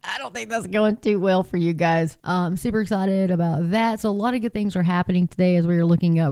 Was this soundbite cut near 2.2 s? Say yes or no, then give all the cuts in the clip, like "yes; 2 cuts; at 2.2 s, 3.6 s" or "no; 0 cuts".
yes; 1 cut; at 2.2 s